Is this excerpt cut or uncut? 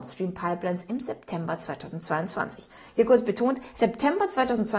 uncut